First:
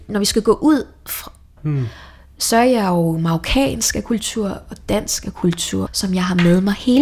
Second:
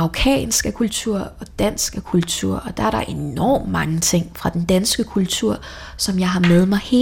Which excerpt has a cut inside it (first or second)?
first